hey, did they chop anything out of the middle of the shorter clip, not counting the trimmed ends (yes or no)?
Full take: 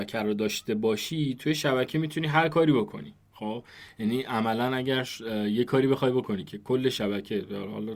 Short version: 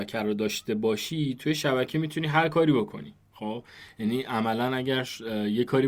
no